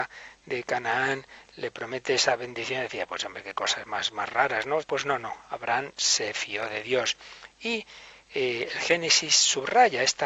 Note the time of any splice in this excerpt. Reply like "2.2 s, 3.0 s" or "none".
4.8 s